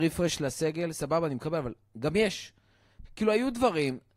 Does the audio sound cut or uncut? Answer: cut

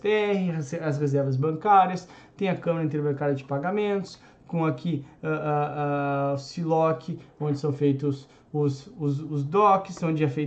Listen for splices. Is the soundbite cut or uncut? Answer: uncut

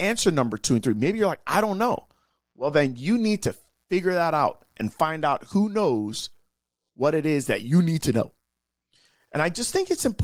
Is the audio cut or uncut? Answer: uncut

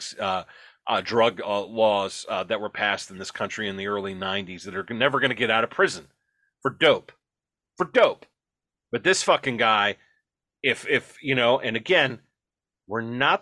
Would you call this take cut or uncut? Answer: uncut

